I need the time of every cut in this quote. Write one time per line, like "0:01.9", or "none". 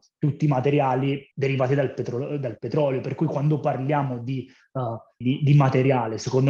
0:01.3
0:05.2